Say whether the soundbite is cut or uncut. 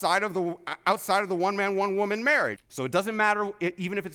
cut